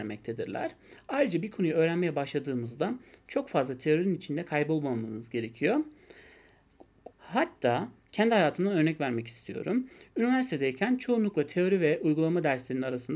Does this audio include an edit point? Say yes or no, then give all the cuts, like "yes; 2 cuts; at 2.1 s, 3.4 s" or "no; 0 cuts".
yes; 1 cut; at 7.1 s